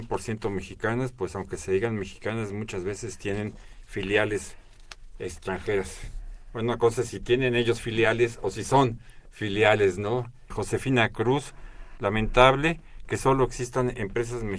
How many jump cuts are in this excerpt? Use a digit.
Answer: 2